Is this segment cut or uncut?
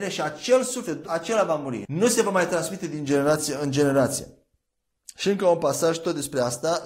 cut